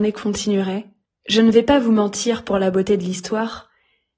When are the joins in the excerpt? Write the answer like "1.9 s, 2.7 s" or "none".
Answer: 1.1 s